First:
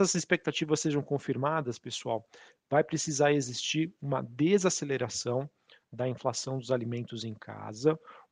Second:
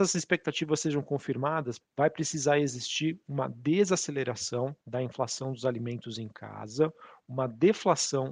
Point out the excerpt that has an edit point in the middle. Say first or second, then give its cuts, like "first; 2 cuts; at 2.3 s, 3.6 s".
second; 2 cuts; at 1.8 s, 4.8 s